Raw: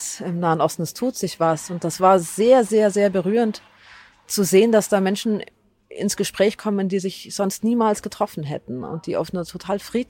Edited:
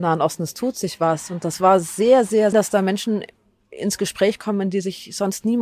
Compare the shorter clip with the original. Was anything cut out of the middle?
yes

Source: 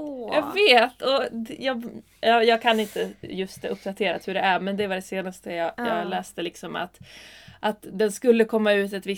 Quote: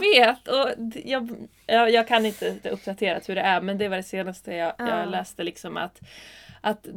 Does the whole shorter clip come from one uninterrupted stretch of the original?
no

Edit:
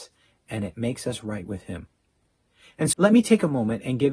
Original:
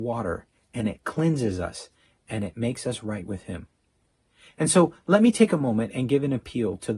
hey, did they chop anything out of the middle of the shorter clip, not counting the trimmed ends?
yes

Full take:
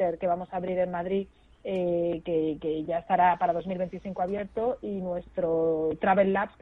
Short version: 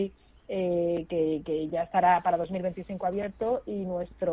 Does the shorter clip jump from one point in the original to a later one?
no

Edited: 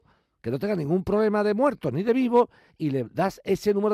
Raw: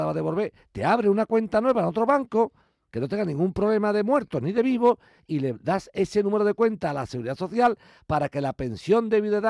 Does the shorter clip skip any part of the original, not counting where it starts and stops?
no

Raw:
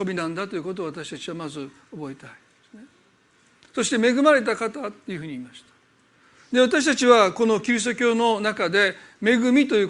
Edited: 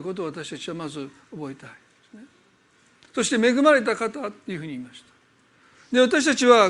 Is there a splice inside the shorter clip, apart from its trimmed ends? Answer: no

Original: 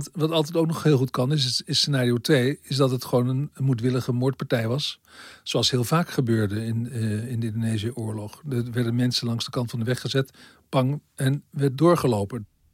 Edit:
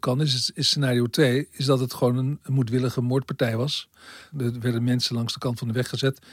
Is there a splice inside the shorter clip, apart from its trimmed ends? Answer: yes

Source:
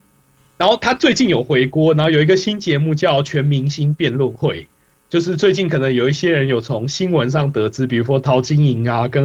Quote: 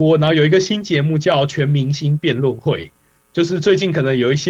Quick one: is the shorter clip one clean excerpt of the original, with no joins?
yes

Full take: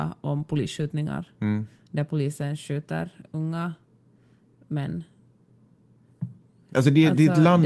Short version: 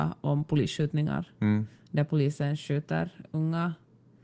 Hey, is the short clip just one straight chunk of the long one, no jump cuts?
yes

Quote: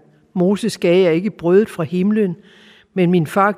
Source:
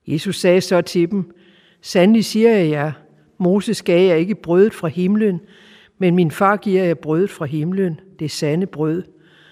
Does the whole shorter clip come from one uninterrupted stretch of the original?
yes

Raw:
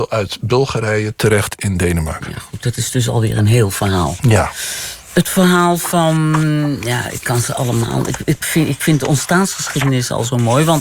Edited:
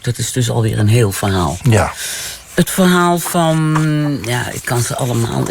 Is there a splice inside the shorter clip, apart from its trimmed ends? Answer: no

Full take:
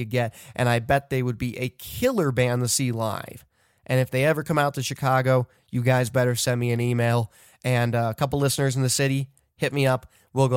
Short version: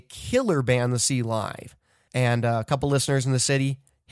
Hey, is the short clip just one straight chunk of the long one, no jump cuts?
no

